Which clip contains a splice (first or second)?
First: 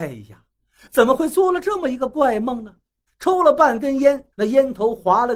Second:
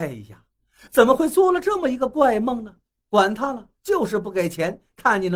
first